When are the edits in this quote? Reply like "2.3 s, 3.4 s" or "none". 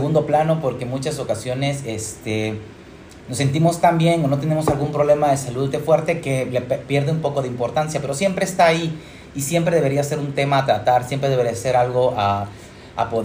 5.7 s